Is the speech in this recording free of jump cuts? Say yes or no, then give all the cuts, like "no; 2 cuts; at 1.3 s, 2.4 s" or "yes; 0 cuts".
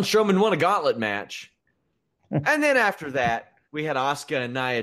no; 2 cuts; at 1.6 s, 3.6 s